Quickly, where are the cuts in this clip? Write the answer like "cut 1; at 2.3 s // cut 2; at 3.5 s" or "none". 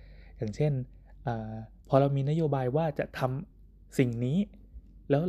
none